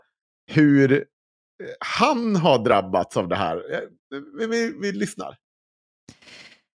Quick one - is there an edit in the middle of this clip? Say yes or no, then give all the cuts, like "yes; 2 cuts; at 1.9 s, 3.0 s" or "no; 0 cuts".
no; 0 cuts